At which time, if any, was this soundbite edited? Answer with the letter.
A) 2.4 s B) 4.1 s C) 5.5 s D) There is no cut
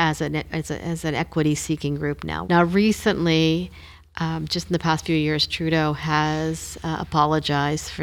A